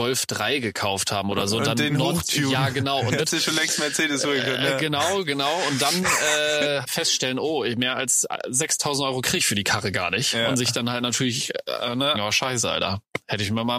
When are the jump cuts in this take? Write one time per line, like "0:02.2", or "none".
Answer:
0:03.2
0:06.8
0:12.1